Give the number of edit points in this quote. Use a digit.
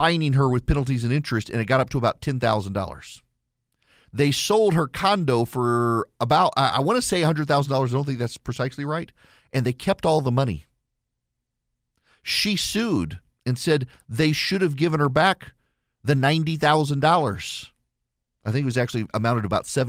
0